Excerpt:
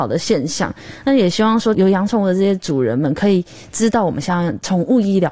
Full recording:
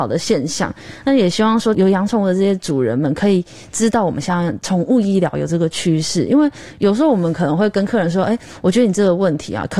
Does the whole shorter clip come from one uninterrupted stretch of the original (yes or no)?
yes